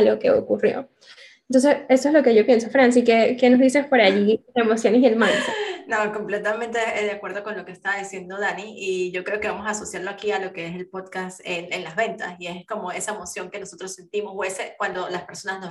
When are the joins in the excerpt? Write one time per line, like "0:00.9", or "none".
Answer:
none